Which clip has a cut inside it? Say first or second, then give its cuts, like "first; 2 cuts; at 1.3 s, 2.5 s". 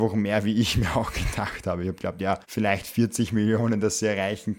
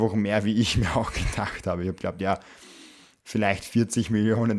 first; 1 cut; at 2.4 s